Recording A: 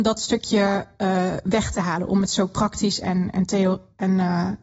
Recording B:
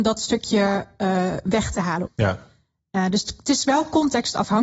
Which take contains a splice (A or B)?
B